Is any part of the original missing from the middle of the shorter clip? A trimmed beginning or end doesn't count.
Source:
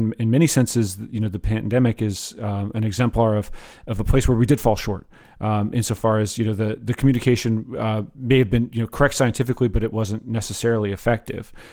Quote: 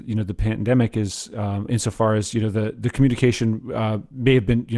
yes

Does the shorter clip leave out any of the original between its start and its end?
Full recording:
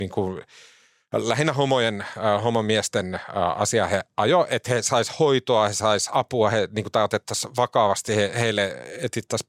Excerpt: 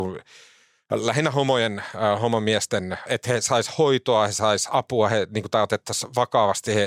yes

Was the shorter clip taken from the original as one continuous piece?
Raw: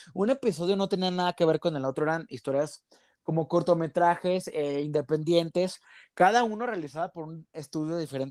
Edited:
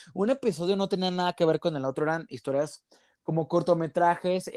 yes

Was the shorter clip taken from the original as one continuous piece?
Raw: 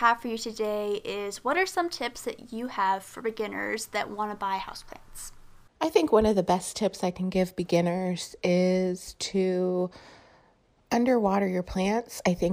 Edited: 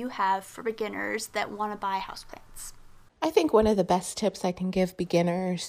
yes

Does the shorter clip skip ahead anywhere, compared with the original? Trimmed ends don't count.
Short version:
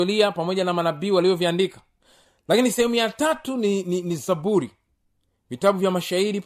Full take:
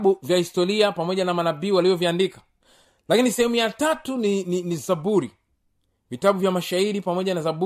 no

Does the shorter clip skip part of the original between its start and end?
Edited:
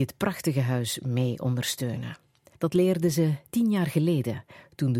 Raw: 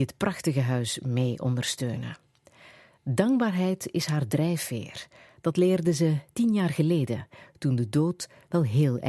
yes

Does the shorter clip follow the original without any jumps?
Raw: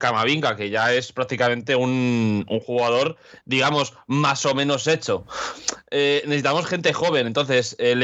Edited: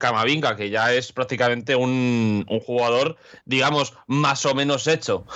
yes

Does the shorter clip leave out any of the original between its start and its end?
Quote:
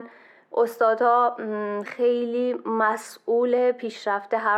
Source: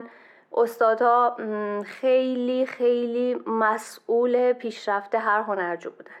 yes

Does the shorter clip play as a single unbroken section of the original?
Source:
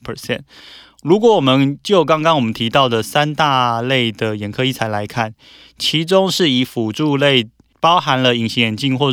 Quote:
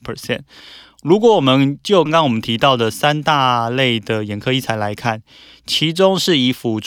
no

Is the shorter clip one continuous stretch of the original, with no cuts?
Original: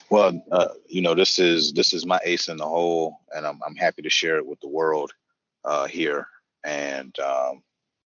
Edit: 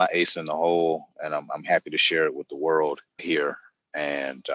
no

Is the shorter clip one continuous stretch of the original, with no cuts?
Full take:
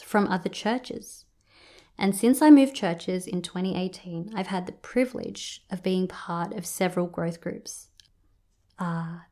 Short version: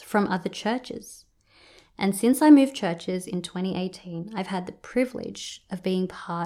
yes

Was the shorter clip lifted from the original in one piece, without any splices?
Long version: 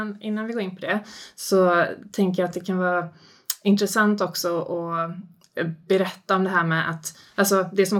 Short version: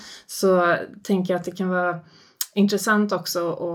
yes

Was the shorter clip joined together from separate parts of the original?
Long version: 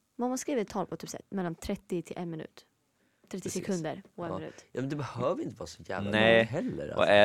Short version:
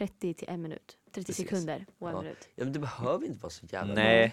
yes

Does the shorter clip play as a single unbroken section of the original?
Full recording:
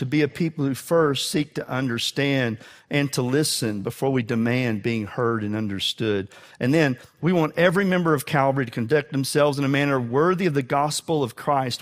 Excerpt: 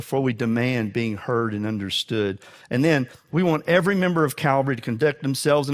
yes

